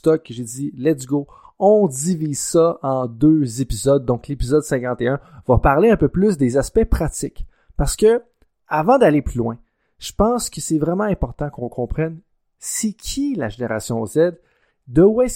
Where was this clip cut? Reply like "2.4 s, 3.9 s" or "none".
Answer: none

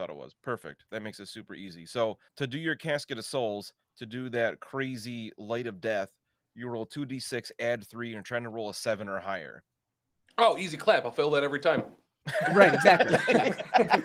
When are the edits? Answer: 2.3 s, 3.8 s

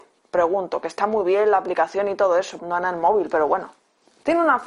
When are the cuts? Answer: 2.6 s

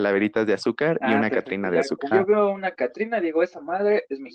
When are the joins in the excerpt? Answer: 2.1 s

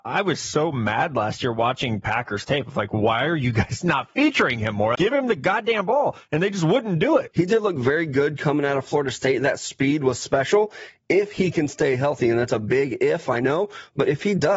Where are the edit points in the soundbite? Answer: 4.9 s, 7.3 s

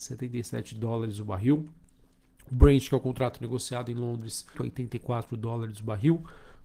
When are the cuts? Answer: 4.5 s

